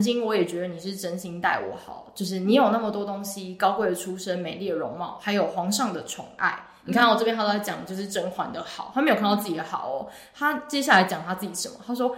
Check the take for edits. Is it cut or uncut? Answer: uncut